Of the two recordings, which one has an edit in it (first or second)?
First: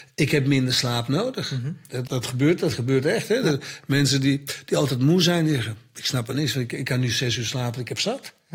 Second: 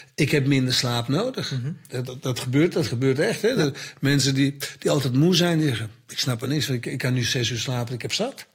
first